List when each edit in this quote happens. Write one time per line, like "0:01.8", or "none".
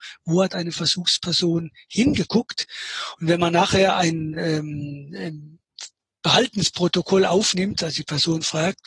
none